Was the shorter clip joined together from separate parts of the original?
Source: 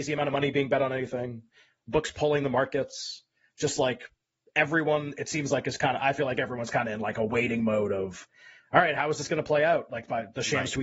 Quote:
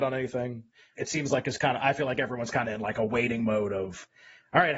yes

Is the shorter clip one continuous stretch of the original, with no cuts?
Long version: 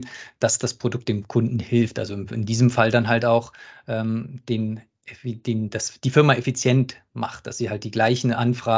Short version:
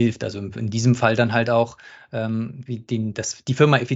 no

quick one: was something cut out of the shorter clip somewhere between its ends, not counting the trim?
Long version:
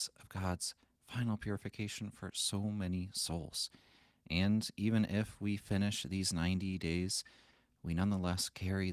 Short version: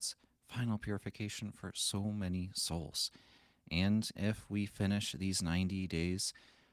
yes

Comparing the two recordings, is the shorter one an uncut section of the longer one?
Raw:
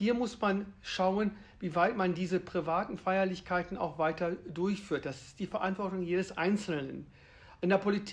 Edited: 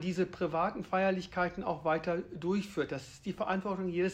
yes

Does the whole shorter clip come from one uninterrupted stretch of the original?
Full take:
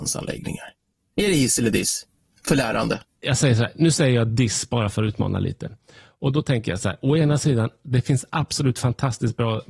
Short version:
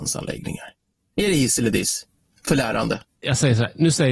yes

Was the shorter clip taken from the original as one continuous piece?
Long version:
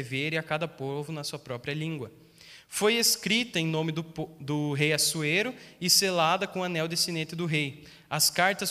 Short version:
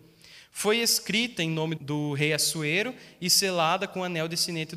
no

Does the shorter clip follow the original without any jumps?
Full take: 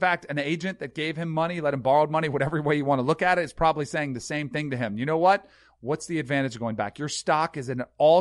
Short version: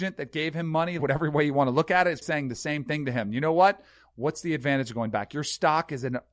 no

